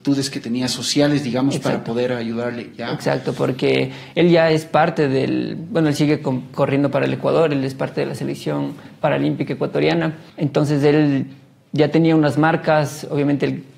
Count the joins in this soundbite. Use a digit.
1